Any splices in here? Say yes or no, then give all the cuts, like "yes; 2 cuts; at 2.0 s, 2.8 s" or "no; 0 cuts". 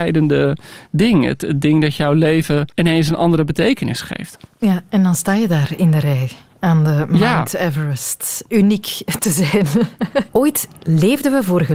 yes; 2 cuts; at 2.7 s, 10.3 s